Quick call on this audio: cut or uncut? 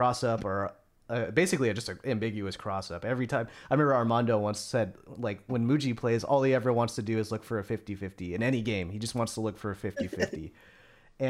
uncut